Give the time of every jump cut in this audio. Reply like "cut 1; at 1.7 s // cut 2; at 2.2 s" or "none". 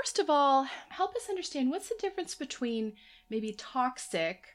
none